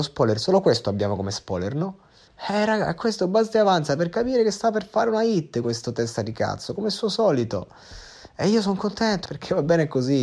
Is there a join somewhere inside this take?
yes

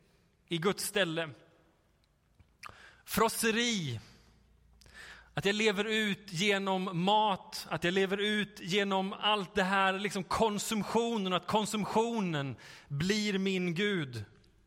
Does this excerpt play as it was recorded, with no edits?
yes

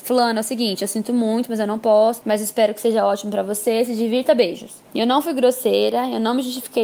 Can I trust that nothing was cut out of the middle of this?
no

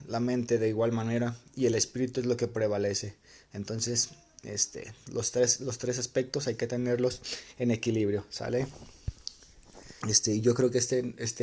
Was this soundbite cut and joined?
yes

